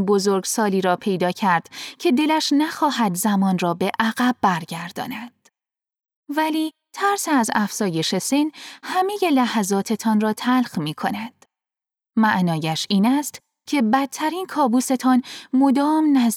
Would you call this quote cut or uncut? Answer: uncut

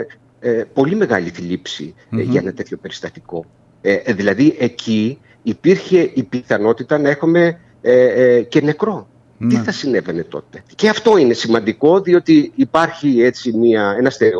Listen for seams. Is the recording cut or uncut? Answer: cut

